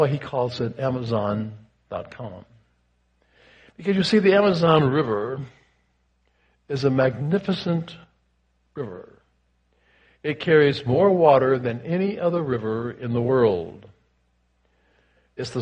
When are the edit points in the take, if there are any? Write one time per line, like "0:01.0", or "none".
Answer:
none

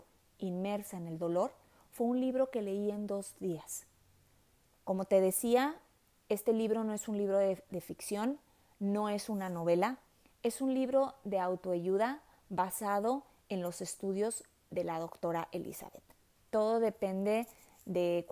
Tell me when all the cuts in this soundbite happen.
0:04.7
0:16.4

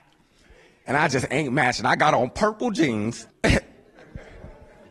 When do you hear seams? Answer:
0:03.3

